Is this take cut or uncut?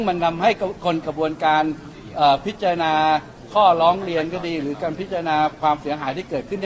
cut